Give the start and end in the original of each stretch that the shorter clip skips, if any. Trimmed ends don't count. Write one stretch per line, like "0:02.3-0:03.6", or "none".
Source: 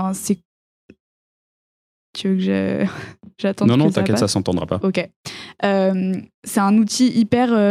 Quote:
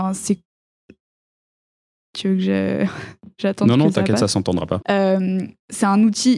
0:04.8-0:05.5